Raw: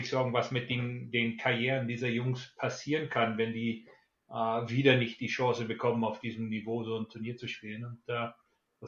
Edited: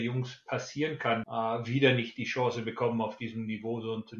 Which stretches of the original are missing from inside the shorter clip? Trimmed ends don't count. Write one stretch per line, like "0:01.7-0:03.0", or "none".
0:03.3-0:04.3

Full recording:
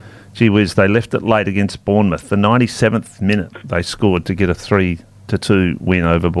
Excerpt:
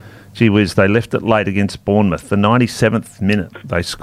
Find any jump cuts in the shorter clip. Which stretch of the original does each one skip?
none

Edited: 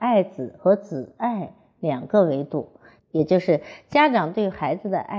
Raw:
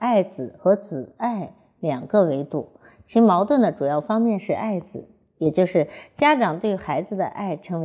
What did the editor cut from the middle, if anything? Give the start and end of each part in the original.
0:03.0-0:05.2

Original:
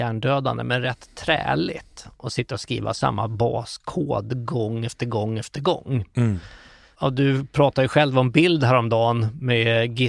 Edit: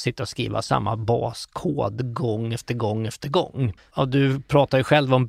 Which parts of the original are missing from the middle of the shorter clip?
0:06.1-0:06.8

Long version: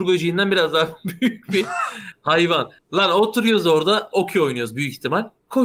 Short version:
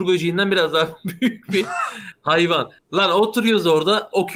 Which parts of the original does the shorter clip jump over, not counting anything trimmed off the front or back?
none

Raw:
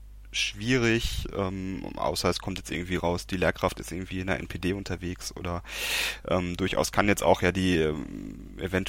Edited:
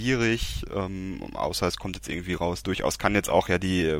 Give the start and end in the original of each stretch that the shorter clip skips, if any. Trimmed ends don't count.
0:03.3-0:06.6

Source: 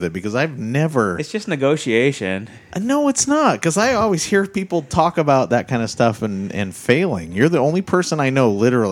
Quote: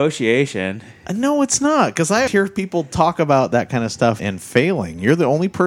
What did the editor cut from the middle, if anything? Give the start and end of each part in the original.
0:03.9-0:04.3
0:06.2-0:06.5

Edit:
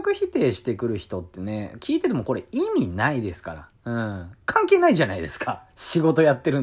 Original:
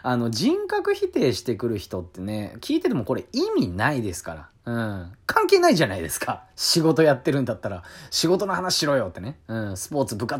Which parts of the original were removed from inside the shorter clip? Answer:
none

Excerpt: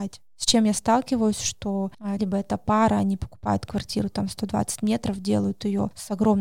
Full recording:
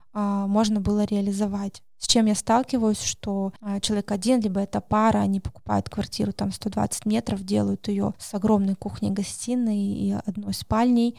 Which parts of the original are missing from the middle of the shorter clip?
0:03.8-0:04.4

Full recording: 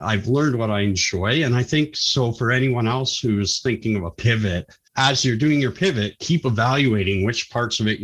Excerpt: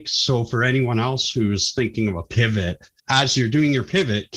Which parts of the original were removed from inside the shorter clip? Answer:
none

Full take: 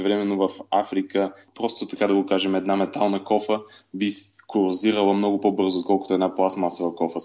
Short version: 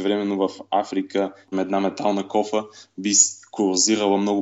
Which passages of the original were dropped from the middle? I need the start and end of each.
0:01.5-0:02.5

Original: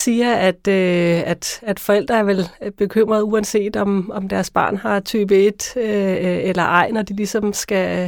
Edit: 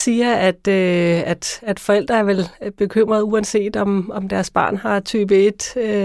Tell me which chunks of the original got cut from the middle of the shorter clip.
none

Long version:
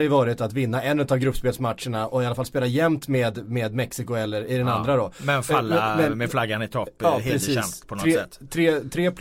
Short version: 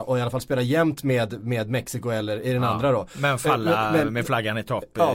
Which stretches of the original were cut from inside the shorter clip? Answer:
none

